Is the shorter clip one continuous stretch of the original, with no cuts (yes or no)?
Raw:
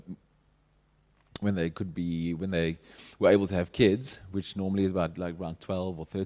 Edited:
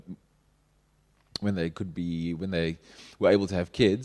yes